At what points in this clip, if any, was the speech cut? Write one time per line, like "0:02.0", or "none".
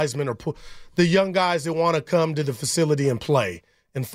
none